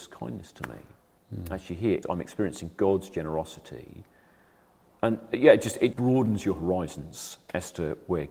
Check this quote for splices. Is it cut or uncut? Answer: cut